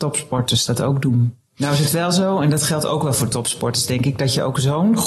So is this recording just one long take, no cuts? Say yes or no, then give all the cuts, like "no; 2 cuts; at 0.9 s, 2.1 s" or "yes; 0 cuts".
no; 1 cut; at 1.4 s